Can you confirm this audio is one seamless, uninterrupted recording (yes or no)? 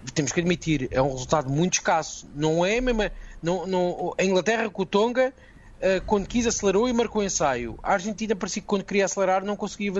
yes